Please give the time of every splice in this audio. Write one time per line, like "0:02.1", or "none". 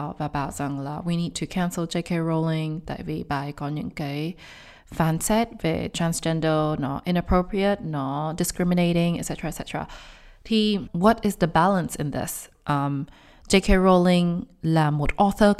none

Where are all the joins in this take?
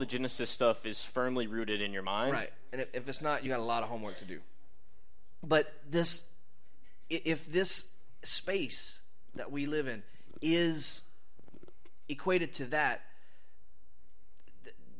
none

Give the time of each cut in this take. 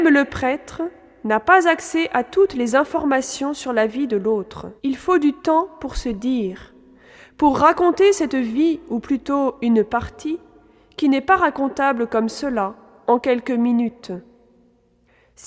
0:04.8

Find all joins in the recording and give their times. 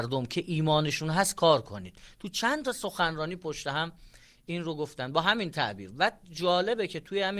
none

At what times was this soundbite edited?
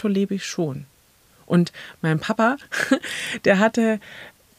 none

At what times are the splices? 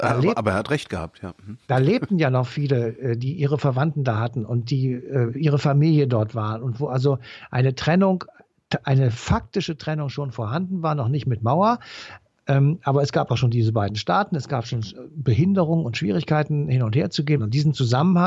0:17.4

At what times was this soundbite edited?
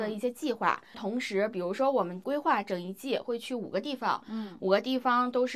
0:00.9

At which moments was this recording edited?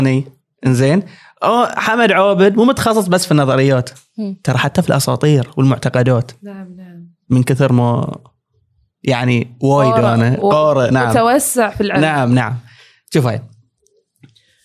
none

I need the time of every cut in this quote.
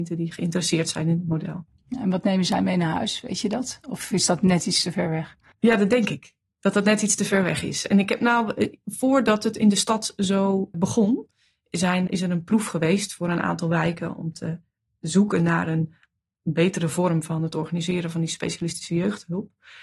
0:10.7
0:12.1

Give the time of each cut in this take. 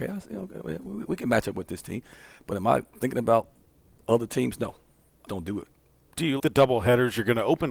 0:05.3
0:06.4

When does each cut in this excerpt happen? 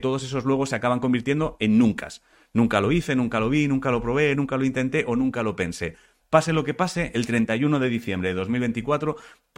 0:04.3
0:06.2

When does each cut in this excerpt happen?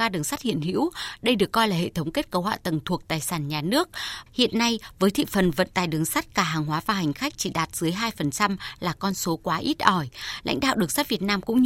0:04.3

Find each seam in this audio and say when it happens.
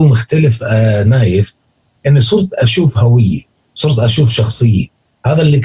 none

